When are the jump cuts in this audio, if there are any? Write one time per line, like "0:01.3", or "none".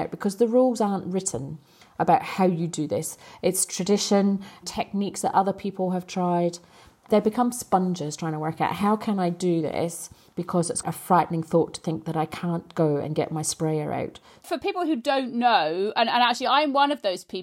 0:10.8
0:14.4